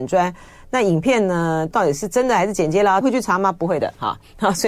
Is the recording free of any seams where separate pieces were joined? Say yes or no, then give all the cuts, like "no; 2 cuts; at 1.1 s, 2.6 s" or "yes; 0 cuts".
no; 2 cuts; at 1.7 s, 3.0 s